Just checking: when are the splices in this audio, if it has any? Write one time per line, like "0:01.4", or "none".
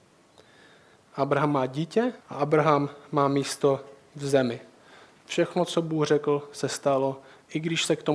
0:02.2